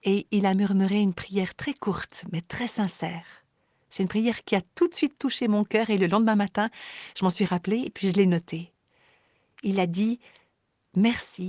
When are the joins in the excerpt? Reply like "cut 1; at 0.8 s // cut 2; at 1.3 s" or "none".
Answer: none

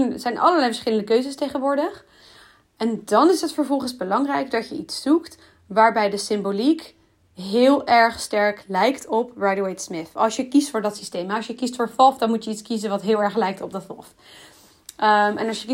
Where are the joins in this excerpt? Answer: none

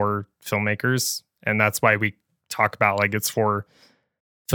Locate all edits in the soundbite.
none

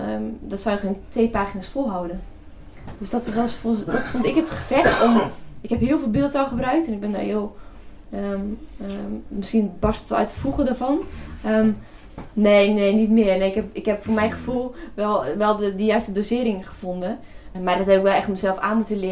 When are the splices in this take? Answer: cut 1; at 12.3 s // cut 2; at 17.5 s

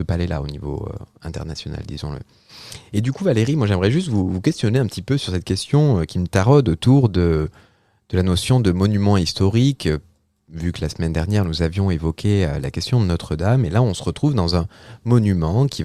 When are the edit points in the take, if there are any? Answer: none

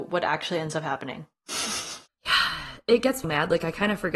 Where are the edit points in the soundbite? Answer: cut 1; at 3.2 s

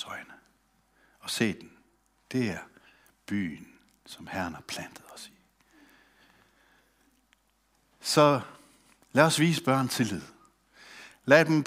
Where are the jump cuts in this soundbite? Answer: none

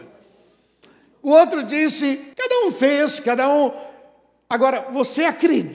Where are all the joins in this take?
cut 1; at 1.1 s // cut 2; at 2.3 s

